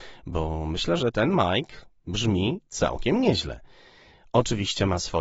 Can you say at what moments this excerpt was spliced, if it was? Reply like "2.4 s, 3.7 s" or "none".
1.0 s